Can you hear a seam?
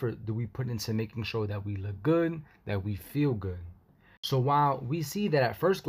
no; 0 cuts

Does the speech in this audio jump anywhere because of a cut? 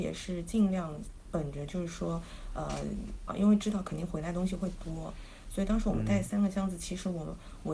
yes; 1 cut; at 3.3 s

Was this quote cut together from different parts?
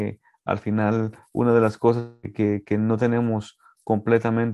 no; 0 cuts

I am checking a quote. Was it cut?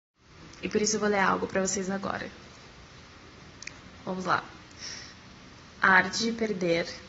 no; 0 cuts

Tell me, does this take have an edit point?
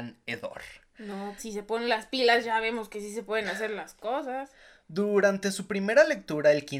yes; 1 cut; at 1.4 s

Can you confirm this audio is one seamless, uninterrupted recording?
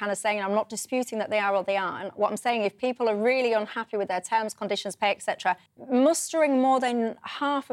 no; 1 cut; at 5.7 s

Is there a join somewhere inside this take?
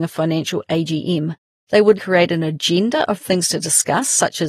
yes; 1 cut; at 1.9 s

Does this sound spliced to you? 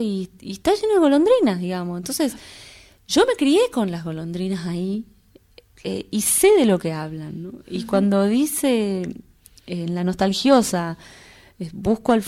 no; 0 cuts

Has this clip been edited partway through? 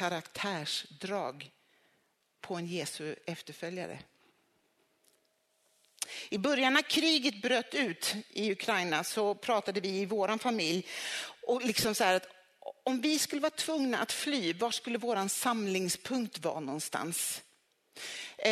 no; 0 cuts

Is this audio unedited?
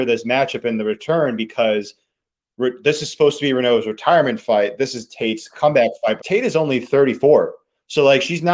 no; 1 cut; at 6.2 s

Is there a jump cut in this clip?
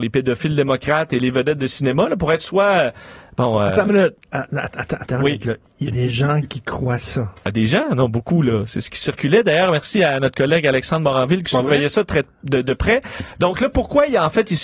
no; 0 cuts

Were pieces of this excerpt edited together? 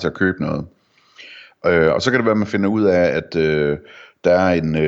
no; 0 cuts

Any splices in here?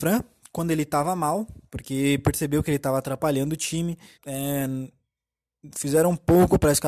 yes; 2 cuts; at 1.7 s, 4.1 s

